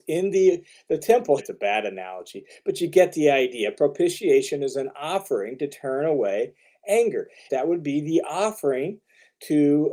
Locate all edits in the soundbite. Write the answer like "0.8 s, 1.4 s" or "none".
1.4 s, 7.5 s

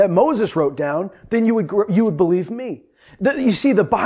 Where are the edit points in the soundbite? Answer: none

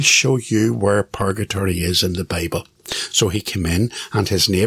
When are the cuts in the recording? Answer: none

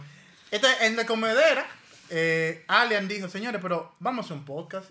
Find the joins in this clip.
none

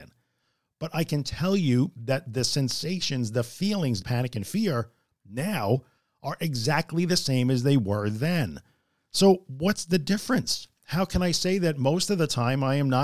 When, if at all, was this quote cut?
4.0 s

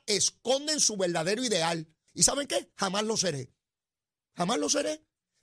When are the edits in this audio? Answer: 2.1 s

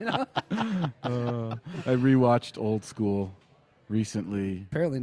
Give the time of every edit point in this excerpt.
none

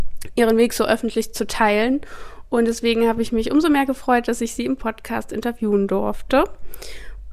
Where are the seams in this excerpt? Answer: none

